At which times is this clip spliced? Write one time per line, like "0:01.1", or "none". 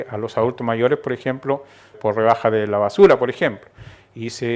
0:01.9